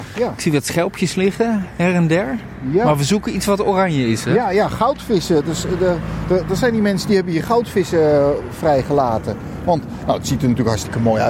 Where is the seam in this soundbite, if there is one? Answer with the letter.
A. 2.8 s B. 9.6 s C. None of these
C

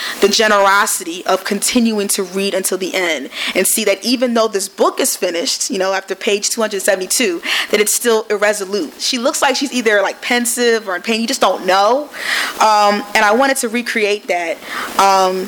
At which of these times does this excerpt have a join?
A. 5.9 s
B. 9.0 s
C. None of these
B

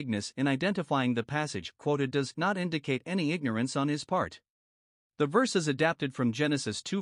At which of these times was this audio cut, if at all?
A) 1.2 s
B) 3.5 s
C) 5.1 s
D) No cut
C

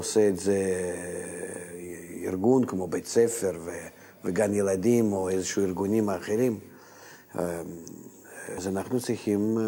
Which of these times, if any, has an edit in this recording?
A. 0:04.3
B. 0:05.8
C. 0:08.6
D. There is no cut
C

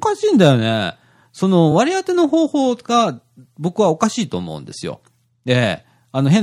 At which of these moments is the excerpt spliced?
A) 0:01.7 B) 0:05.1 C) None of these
C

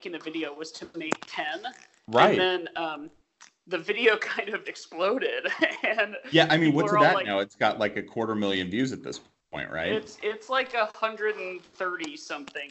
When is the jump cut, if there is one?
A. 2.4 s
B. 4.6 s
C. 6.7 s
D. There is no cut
B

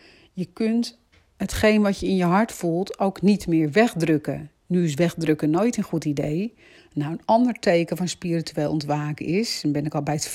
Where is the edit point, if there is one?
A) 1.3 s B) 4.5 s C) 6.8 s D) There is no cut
C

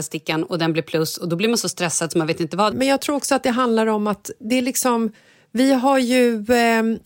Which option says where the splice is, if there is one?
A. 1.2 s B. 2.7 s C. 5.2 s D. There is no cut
B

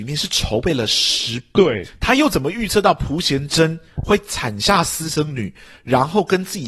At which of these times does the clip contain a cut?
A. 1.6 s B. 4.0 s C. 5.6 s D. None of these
A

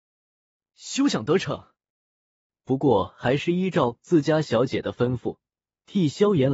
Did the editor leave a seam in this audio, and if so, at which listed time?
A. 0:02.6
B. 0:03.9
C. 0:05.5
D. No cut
A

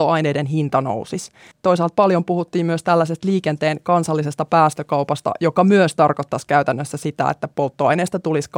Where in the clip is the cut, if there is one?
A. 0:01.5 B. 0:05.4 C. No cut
A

